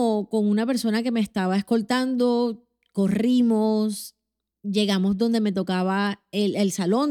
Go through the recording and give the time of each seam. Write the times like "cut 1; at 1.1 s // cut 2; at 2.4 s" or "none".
none